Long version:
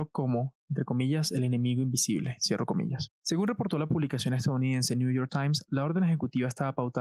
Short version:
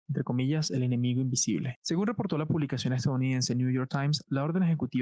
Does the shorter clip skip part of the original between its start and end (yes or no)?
yes